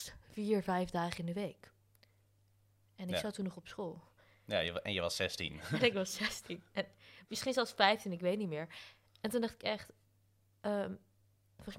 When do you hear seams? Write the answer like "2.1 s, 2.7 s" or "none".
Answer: none